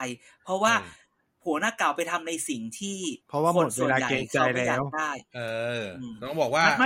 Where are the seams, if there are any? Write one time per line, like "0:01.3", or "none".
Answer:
0:03.2